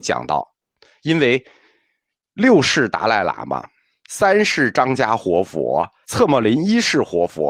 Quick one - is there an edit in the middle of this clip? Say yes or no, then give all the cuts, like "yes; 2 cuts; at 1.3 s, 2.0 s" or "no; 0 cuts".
yes; 2 cuts; at 4.0 s, 6.0 s